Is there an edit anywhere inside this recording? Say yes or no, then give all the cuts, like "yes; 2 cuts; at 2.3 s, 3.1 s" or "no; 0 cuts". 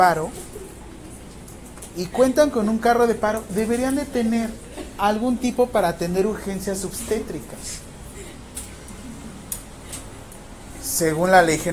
no; 0 cuts